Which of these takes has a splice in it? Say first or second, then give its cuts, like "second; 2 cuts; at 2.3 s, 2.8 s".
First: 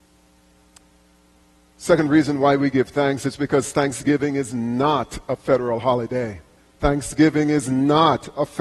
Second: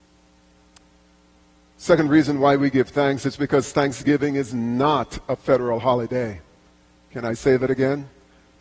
first; 1 cut; at 6.6 s